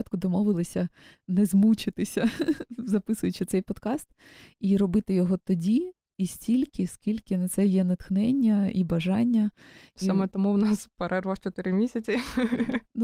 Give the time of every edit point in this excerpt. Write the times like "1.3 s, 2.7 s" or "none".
none